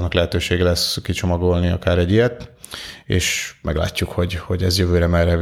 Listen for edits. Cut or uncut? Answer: uncut